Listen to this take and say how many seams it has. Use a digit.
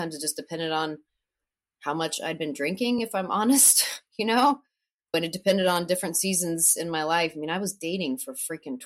0